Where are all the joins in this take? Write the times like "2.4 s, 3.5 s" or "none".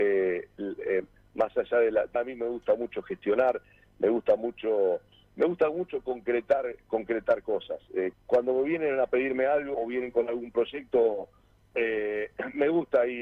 2.2 s, 8.1 s, 9.7 s